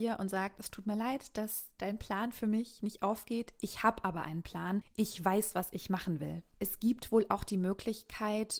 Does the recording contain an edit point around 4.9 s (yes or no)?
no